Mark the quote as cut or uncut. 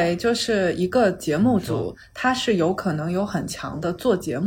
uncut